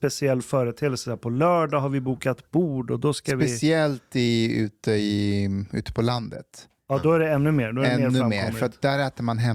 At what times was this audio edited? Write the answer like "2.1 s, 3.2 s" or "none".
none